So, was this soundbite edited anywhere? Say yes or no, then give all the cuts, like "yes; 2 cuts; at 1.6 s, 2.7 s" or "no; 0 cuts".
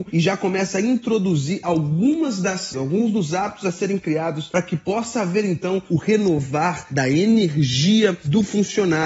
yes; 1 cut; at 2.7 s